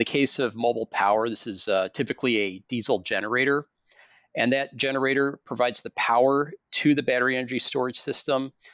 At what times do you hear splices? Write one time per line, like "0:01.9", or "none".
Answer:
none